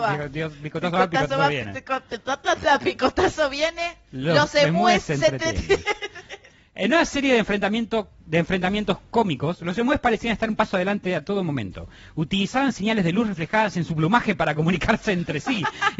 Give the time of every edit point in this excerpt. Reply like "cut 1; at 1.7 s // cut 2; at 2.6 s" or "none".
none